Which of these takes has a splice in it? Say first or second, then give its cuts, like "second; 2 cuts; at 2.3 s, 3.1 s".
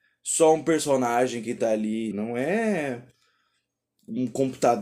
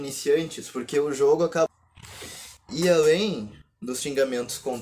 first; 1 cut; at 2.1 s